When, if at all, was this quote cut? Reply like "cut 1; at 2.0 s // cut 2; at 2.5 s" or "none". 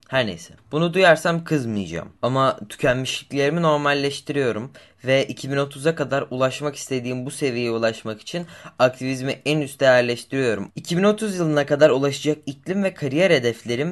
cut 1; at 2.2 s // cut 2; at 10.7 s

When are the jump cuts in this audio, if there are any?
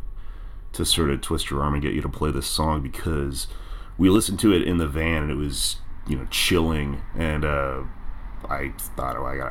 none

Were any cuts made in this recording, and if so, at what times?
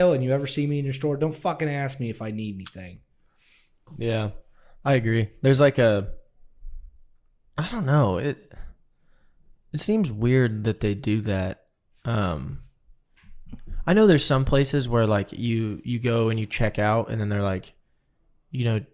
none

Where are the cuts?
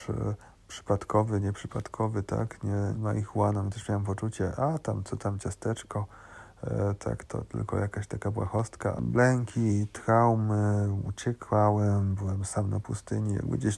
cut 1; at 2.9 s // cut 2; at 7.3 s // cut 3; at 9.0 s

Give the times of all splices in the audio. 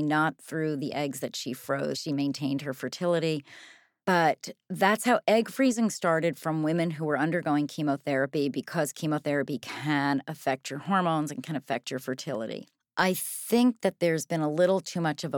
none

